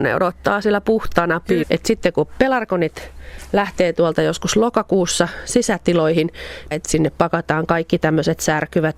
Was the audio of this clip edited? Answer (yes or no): yes